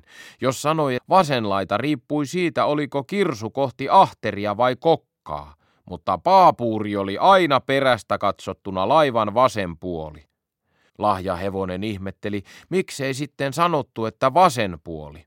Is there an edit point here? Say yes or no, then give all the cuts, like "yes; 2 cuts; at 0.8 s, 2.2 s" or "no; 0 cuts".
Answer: yes; 2 cuts; at 1.0 s, 10.9 s